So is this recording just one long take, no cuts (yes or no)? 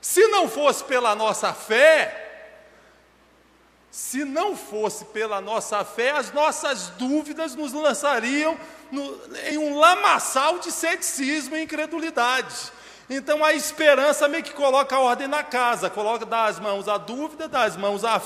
yes